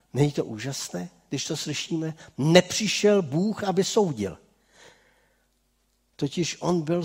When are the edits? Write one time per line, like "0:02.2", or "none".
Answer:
0:06.1